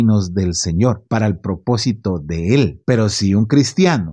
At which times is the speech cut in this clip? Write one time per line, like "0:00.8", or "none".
none